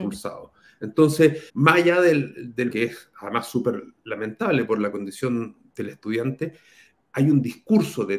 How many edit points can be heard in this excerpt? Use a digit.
3